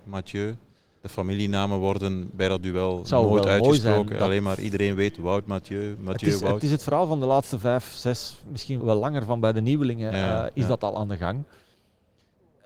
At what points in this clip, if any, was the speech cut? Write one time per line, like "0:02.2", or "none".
0:08.8